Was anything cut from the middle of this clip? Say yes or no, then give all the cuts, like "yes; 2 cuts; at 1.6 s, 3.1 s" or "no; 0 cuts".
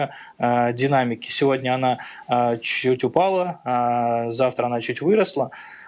no; 0 cuts